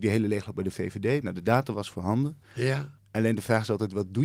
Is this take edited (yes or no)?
yes